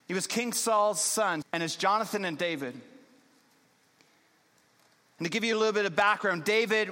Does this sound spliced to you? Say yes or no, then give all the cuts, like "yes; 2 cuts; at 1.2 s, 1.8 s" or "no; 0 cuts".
yes; 1 cut; at 1.4 s